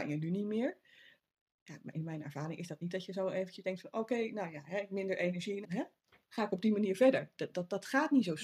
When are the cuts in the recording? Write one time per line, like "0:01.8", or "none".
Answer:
0:05.6